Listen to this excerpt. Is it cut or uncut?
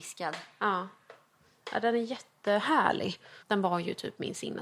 cut